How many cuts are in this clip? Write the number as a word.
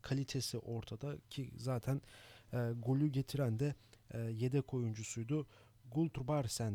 zero